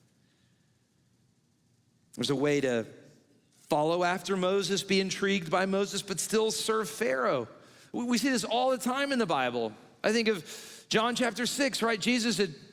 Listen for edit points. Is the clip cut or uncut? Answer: uncut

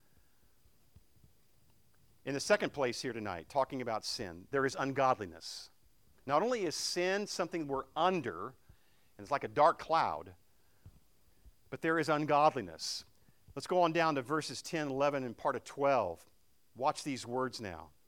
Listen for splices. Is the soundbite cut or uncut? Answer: uncut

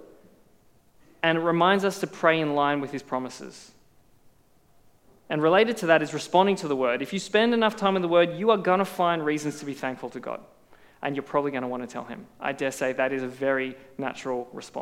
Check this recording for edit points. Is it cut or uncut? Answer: uncut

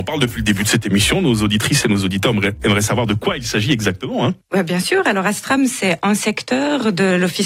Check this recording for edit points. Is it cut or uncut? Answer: uncut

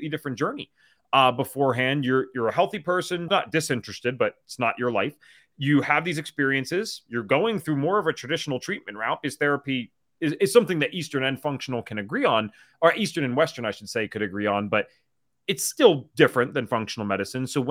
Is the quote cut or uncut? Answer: cut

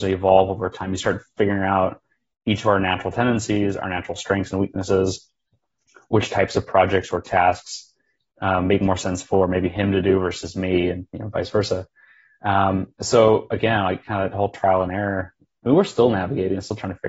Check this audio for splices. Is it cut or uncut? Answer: uncut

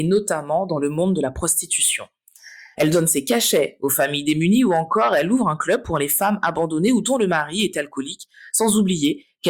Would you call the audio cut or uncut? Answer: cut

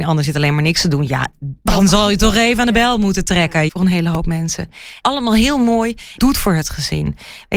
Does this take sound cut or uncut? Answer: cut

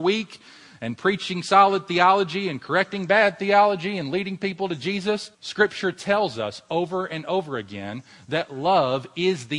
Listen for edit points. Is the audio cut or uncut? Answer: cut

